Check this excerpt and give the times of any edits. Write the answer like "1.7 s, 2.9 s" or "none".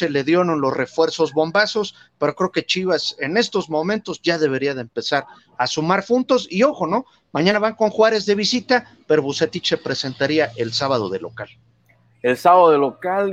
none